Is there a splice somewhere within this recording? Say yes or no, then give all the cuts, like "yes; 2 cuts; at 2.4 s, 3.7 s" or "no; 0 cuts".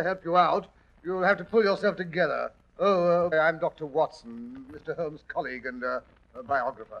yes; 1 cut; at 3.3 s